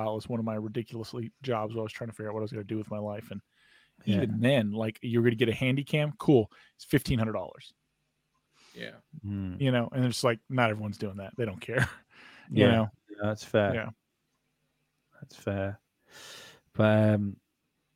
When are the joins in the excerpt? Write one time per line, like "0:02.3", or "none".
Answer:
none